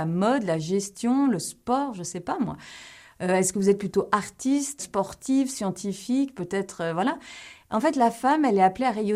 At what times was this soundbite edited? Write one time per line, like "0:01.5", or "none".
0:04.8